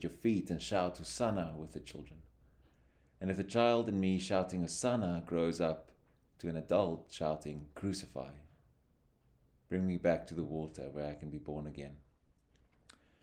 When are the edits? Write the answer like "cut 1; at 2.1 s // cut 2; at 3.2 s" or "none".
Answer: none